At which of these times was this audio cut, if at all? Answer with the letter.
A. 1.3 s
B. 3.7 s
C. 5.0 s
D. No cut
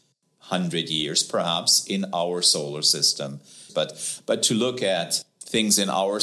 B